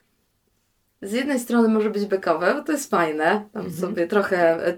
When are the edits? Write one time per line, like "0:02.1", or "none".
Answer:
none